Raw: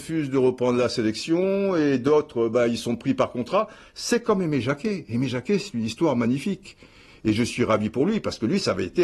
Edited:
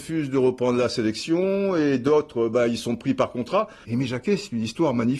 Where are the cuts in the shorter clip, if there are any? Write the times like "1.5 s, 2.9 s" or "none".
3.8 s